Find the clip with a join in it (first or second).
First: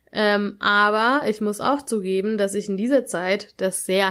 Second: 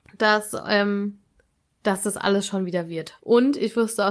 second